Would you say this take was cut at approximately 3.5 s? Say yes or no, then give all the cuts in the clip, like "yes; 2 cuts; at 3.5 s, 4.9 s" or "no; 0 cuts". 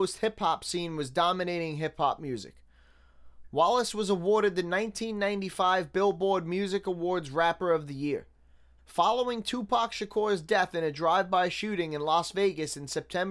no; 1 cut; at 8.8 s